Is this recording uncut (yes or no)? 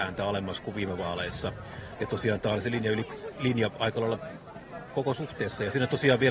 no